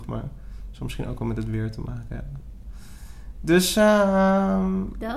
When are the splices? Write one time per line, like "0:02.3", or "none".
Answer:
none